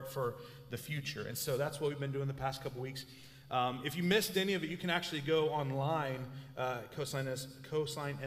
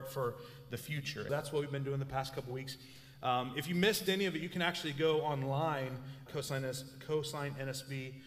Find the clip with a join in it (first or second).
second